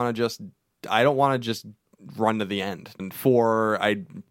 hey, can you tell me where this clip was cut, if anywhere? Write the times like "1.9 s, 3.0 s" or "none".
3.0 s